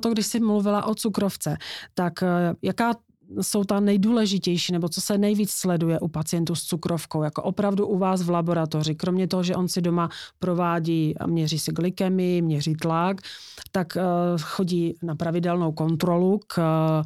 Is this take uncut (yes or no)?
yes